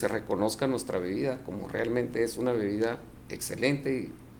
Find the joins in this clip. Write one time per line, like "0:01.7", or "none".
none